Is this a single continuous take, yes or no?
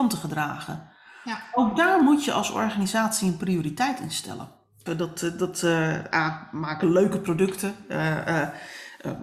no